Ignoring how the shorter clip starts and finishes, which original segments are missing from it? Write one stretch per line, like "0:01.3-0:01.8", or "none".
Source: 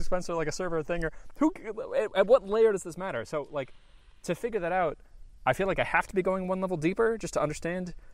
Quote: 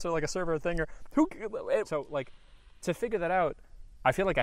0:02.1-0:03.3